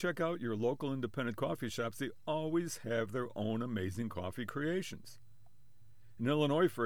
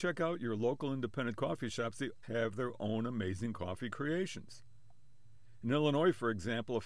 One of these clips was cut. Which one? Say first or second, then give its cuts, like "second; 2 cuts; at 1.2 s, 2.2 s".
second; 1 cut; at 2.2 s